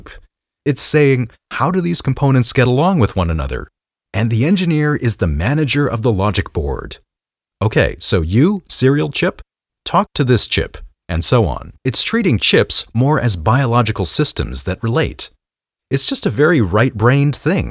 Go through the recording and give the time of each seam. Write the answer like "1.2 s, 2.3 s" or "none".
11.8 s